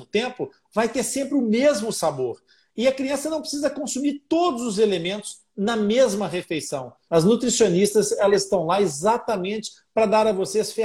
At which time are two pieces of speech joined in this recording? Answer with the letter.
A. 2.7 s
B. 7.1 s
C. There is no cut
B